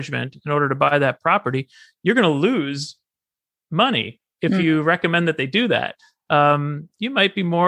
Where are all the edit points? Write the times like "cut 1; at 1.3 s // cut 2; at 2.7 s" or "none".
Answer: none

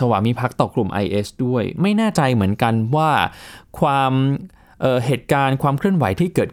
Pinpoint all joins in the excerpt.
none

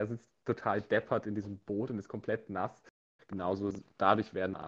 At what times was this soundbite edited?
cut 1; at 3.2 s

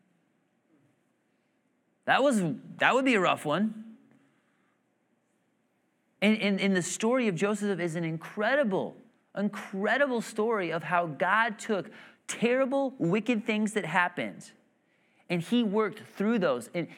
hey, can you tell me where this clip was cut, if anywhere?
cut 1; at 6.2 s

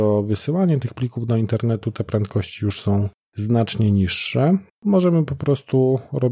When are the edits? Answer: cut 1; at 4.7 s

